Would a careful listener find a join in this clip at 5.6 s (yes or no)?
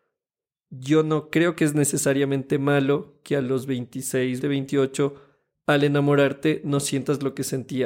no